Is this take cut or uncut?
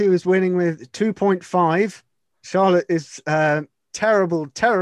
uncut